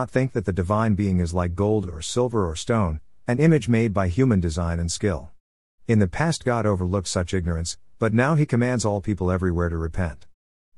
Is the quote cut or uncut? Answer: uncut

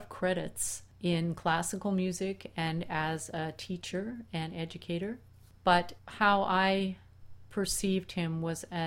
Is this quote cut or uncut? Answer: uncut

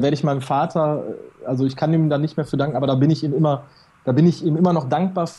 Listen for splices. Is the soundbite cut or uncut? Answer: uncut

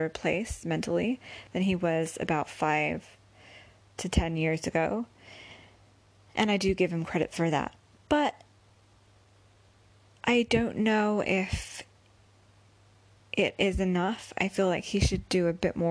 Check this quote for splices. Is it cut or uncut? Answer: uncut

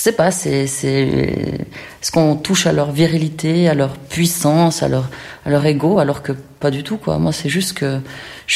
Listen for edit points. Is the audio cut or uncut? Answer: uncut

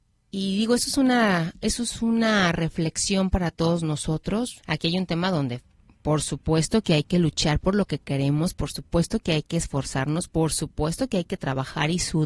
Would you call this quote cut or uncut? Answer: cut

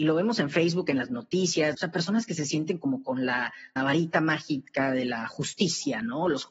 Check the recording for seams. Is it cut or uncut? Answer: cut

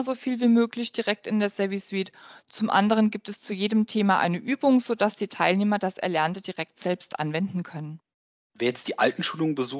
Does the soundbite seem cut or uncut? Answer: uncut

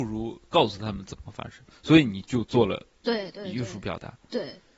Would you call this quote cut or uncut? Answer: uncut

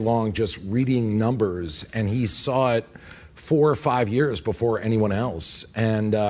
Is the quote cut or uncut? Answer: uncut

